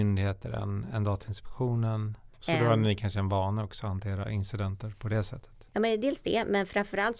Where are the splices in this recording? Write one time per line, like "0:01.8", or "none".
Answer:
0:02.3